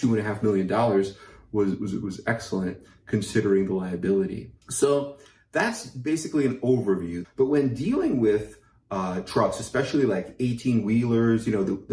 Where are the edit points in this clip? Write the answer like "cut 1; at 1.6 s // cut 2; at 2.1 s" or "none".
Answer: cut 1; at 4.6 s // cut 2; at 7.2 s